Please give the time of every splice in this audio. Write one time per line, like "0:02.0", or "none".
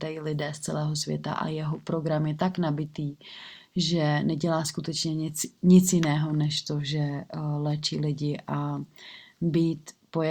none